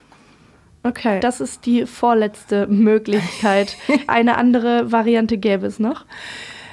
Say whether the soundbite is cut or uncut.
cut